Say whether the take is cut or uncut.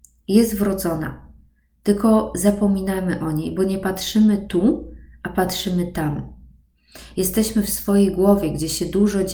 uncut